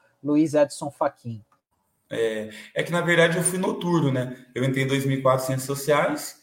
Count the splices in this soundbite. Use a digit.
1